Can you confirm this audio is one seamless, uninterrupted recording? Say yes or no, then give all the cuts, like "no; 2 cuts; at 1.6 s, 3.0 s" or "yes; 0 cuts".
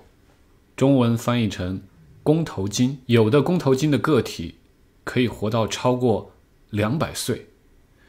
no; 1 cut; at 3.0 s